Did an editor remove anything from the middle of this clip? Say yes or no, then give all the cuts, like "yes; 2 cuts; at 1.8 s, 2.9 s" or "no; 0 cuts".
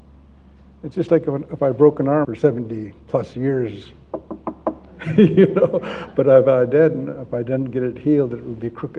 yes; 1 cut; at 2.2 s